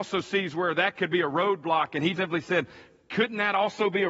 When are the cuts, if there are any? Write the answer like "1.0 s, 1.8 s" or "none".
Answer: 2.2 s